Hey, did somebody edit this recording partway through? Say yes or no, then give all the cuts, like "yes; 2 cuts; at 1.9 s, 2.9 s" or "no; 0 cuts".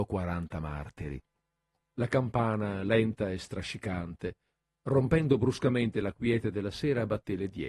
yes; 1 cut; at 1.9 s